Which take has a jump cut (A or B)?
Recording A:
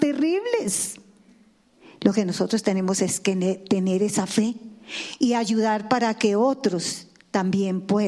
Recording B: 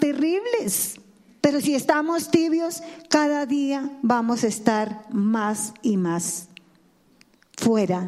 B